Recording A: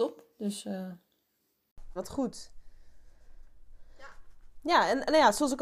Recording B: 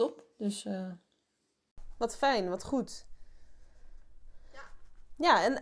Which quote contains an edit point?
A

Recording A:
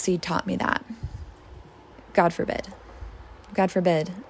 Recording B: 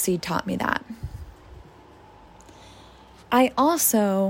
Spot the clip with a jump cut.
A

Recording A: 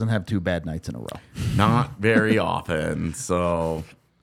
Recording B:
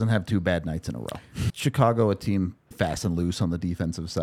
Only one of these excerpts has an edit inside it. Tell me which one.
B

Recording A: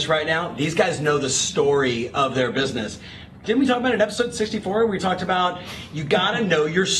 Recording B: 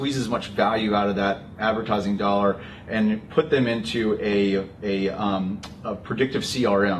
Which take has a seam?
A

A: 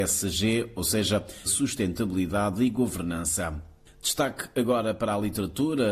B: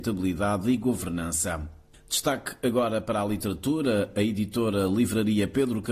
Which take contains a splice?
A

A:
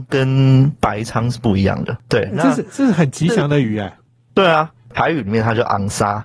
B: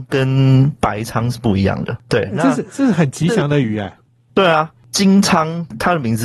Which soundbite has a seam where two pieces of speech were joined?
A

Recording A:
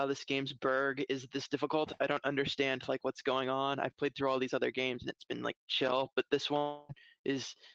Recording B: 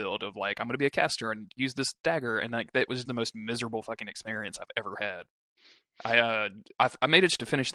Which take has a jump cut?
B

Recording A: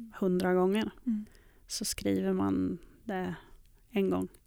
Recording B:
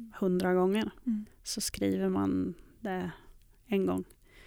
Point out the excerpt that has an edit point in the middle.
B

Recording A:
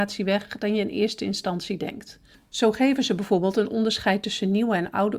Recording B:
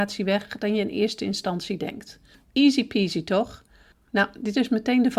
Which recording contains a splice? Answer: B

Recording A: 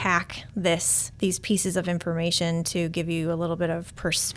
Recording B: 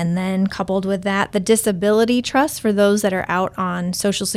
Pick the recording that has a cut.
A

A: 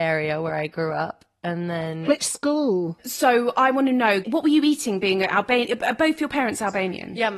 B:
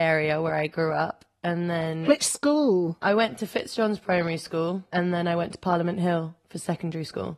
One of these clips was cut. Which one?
A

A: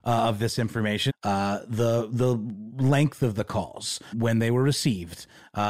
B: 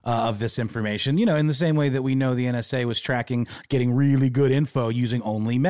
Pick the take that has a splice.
A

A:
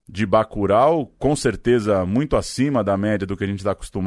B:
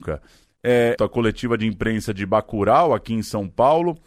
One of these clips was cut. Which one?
B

